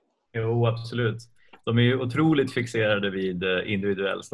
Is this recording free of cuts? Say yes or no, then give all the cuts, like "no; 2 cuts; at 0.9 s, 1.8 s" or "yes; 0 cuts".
yes; 0 cuts